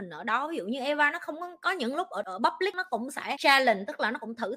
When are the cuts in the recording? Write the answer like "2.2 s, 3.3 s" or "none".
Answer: none